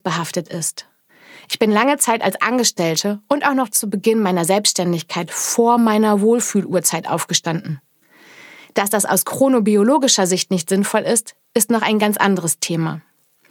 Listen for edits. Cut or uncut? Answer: uncut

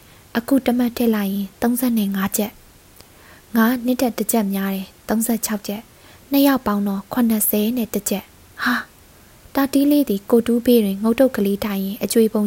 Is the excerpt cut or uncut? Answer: cut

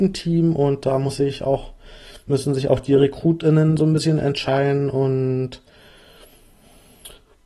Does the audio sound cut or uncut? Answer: uncut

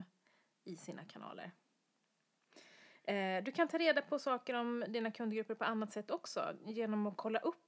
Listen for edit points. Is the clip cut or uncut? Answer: uncut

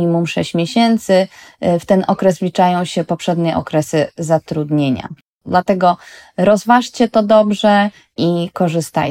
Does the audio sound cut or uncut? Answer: cut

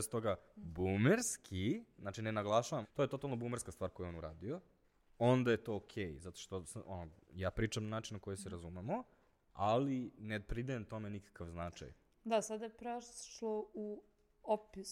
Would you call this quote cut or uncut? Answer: cut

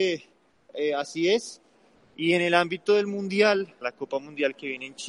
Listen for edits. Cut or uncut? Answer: cut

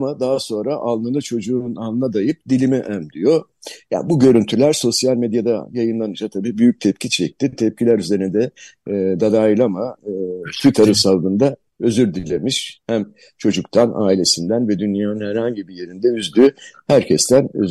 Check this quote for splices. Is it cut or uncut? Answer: uncut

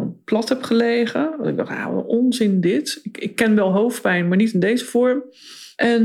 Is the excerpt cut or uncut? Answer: uncut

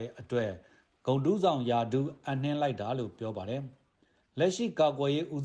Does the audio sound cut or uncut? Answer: uncut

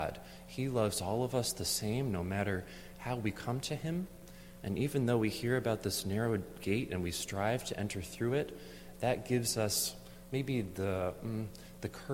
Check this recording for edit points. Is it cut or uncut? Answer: uncut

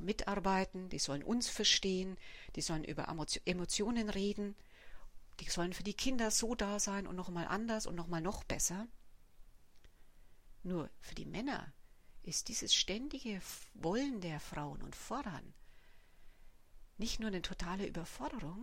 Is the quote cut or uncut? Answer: uncut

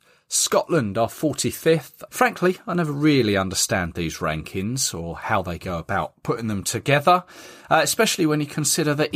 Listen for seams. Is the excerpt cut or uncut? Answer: cut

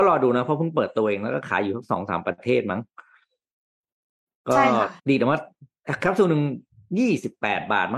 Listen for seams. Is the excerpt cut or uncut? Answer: cut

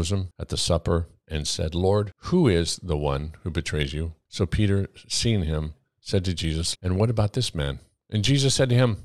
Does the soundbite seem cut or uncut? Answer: cut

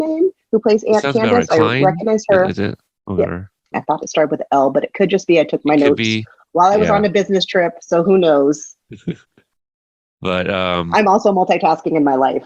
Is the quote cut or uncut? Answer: cut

